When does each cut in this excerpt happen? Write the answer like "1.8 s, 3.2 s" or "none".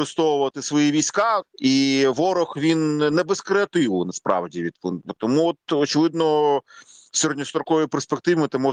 1.4 s, 5.2 s